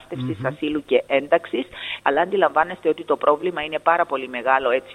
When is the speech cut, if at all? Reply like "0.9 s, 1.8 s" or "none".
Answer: 2.0 s

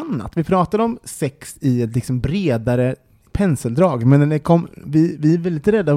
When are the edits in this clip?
none

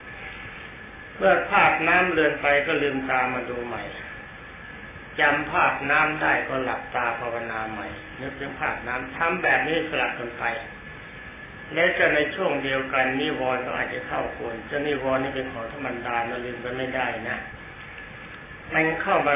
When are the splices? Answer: 14.7 s

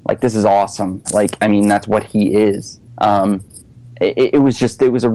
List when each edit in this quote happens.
1.0 s

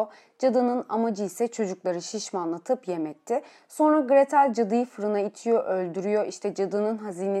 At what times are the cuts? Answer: none

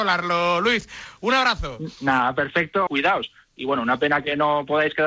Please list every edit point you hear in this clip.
2.9 s

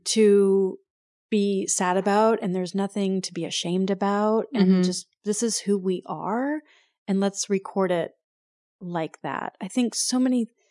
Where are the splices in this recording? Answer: none

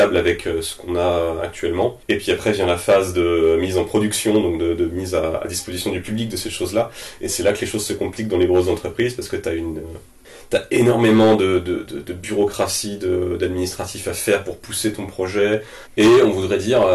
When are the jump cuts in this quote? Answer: 11.9 s, 15.9 s

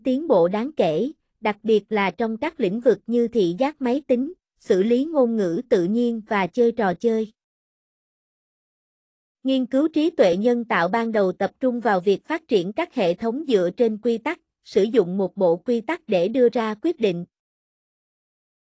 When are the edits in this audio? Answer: 9.3 s

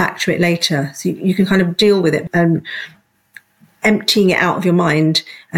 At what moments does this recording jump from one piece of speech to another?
2.3 s

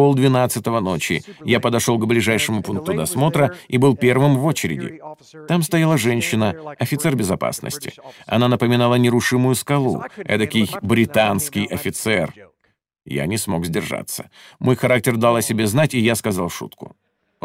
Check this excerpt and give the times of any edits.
none

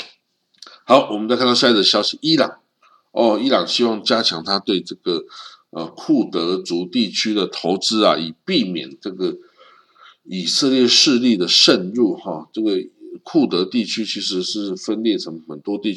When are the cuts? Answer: none

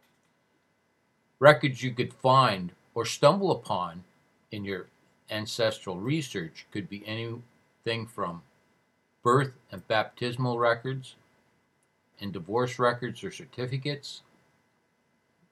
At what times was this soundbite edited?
12.1 s

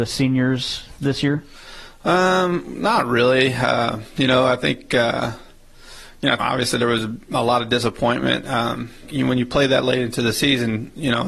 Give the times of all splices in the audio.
6.4 s, 9.0 s

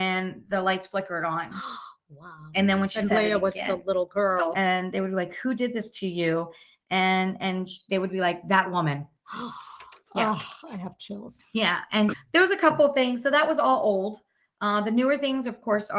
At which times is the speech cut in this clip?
4.5 s, 12.1 s

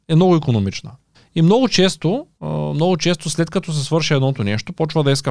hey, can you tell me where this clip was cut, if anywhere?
1.1 s, 2.4 s

